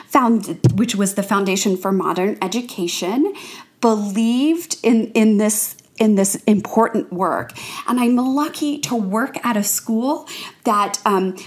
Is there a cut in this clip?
no; 0 cuts

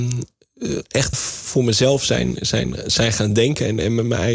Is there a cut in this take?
yes; 1 cut; at 1.1 s

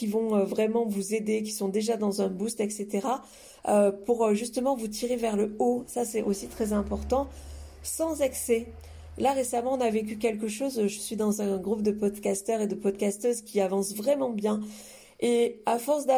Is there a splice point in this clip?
no; 0 cuts

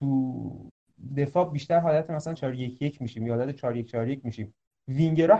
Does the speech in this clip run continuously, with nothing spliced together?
no; 1 cut; at 2.4 s

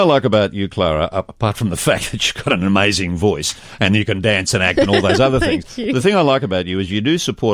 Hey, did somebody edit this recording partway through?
no; 0 cuts

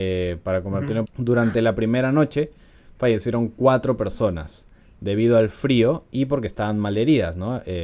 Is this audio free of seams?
no; 1 cut; at 1.0 s

